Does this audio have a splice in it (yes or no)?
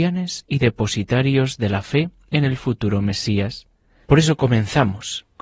yes